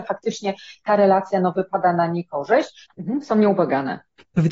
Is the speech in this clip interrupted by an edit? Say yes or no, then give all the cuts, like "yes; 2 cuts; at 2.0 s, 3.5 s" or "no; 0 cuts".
yes; 1 cut; at 2.9 s